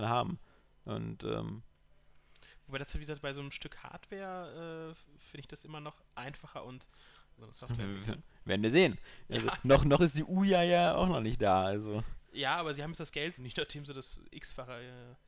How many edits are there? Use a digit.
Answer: 3